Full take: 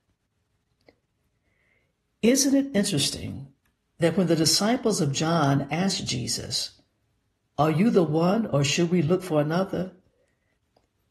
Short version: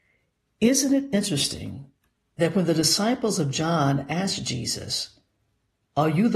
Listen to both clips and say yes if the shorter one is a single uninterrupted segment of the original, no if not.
yes